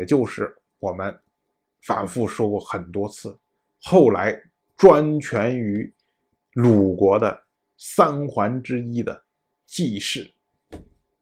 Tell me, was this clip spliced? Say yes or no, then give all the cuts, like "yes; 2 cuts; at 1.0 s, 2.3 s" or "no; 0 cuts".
no; 0 cuts